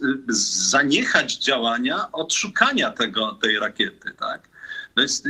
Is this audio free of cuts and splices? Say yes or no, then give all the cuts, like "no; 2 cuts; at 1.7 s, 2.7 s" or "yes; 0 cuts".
yes; 0 cuts